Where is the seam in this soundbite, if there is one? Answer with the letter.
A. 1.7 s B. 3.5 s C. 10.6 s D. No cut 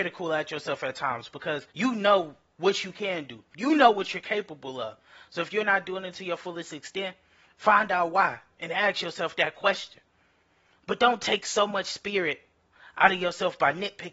A